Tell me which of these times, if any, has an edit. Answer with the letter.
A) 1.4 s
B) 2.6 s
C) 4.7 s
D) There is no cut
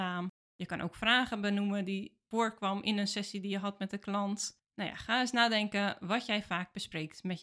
D